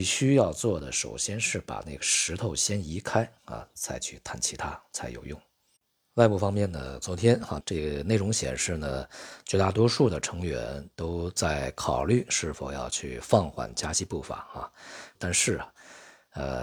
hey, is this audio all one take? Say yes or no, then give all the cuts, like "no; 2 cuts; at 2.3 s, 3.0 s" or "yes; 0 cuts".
no; 2 cuts; at 7.6 s, 15.2 s